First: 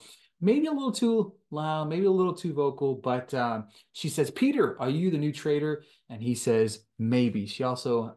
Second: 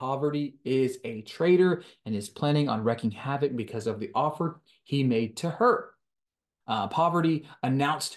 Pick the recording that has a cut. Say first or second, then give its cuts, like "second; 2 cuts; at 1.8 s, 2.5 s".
second; 1 cut; at 6.6 s